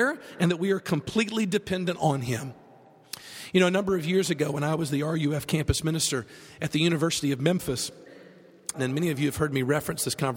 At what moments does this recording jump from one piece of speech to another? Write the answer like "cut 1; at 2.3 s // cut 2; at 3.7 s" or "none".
cut 1; at 8.7 s